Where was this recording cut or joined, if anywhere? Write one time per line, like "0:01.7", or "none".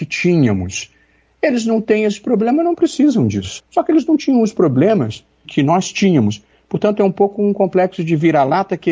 0:03.6
0:05.4